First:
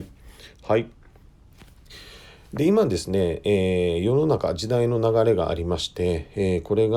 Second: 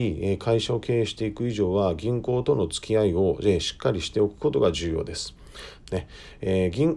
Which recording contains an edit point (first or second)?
second